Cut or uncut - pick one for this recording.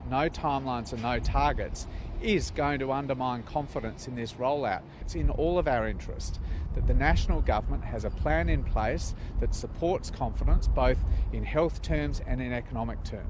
cut